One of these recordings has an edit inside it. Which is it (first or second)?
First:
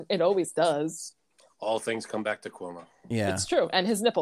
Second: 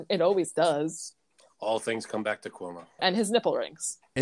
second